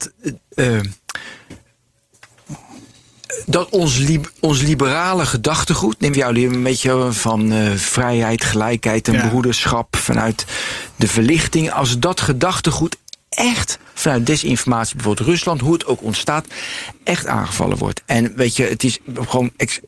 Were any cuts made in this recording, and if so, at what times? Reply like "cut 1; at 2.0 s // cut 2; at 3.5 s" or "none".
cut 1; at 6.1 s // cut 2; at 18.0 s